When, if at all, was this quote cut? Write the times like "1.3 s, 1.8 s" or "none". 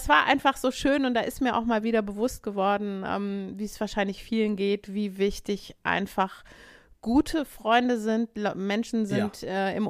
none

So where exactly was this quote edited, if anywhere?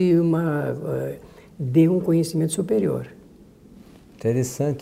none

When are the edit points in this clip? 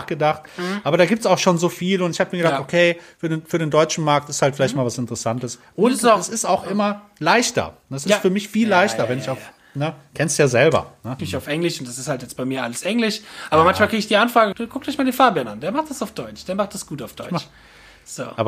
11.2 s, 14.5 s

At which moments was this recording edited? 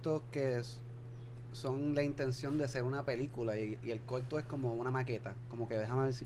none

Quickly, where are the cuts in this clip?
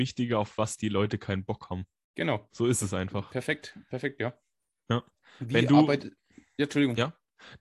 none

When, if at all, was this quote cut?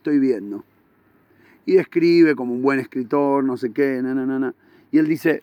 none

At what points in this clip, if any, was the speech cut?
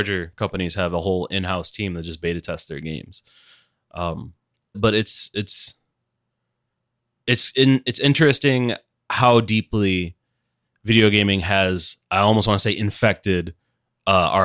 4.7 s

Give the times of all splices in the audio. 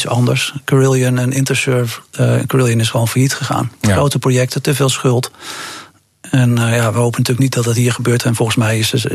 none

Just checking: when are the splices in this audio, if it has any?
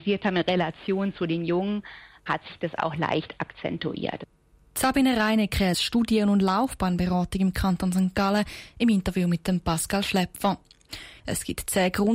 5.7 s, 11.2 s

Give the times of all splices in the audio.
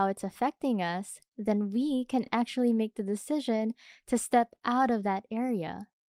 none

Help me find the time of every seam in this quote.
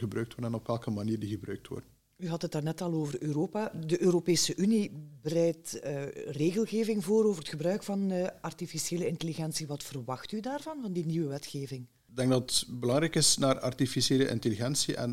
none

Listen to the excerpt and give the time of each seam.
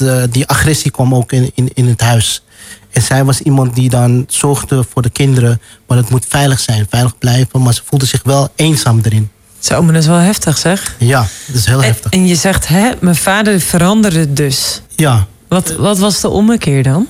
14.9 s

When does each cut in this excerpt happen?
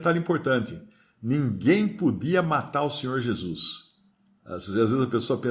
none

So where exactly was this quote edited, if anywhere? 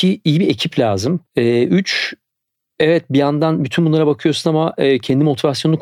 1.3 s

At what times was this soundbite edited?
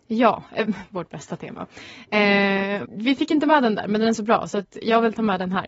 2.8 s

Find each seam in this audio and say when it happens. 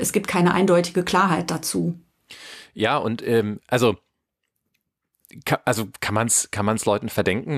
none

